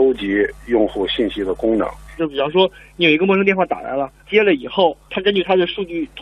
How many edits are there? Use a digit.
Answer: 2